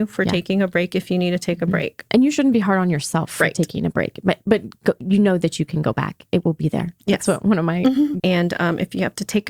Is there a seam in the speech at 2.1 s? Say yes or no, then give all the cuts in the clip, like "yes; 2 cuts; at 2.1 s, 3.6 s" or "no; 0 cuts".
no; 1 cut; at 8.2 s